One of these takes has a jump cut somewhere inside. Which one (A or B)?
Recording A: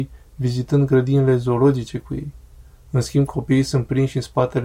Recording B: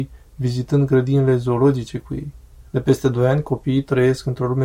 B